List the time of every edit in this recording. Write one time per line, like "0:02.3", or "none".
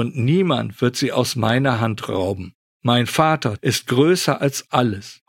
0:03.6

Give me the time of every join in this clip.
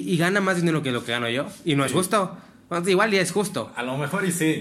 none

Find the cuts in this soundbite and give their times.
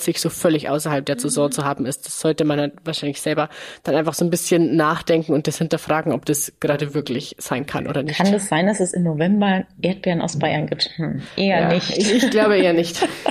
none

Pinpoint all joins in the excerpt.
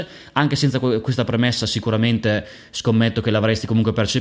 none

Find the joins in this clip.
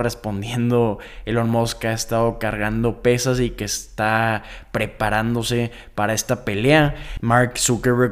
0:07.2

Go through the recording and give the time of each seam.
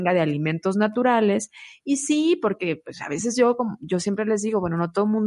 none

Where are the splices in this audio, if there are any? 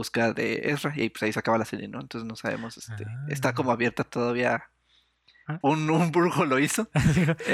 0:05.6

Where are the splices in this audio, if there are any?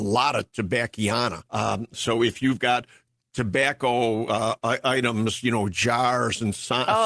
0:01.5

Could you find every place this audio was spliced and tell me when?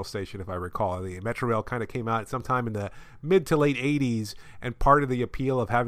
none

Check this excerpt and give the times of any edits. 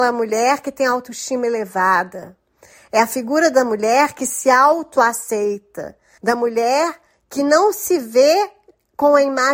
0:06.2

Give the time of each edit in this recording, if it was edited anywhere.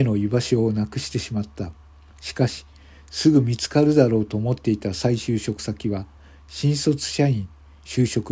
0:02.1

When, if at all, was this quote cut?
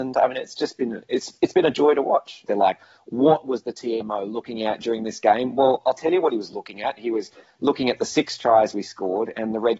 0:02.5

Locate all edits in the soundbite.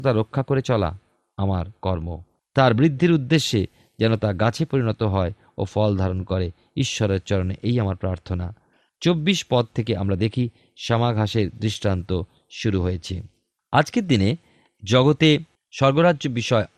none

